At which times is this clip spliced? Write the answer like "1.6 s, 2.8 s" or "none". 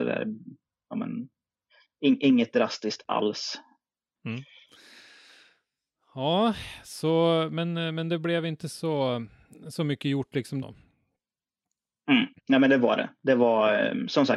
4.2 s, 10.6 s, 12.4 s

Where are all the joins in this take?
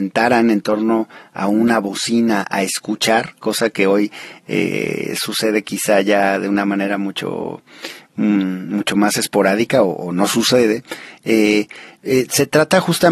none

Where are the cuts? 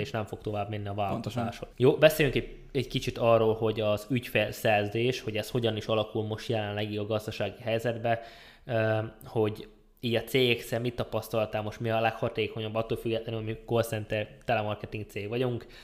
1.7 s

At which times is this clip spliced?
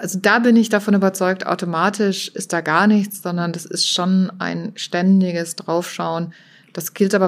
none

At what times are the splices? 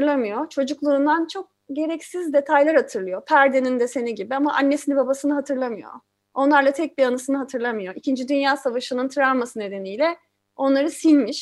none

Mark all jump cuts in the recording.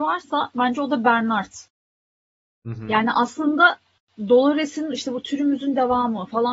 none

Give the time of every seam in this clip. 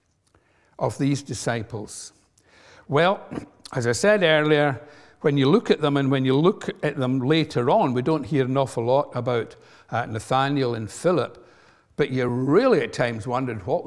none

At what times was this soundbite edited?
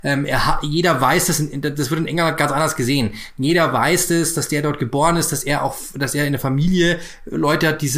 none

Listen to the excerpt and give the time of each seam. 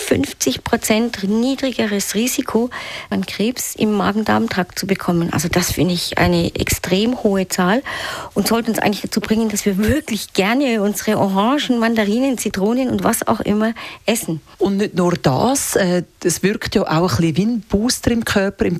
3.1 s

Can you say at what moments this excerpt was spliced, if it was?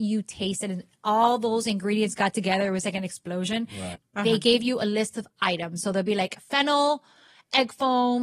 4.0 s

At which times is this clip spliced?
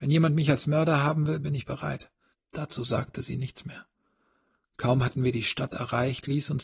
2.3 s

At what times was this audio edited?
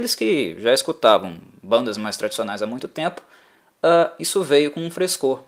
none

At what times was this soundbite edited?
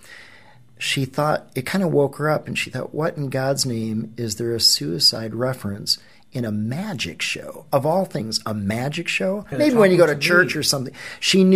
none

